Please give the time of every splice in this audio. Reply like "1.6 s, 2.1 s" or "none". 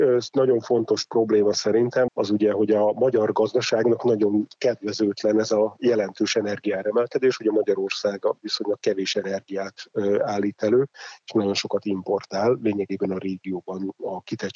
2.1 s